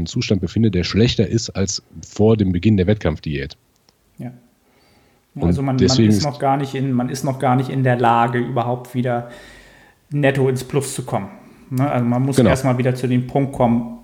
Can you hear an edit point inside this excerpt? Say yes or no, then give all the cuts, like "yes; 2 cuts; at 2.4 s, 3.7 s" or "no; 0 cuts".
no; 0 cuts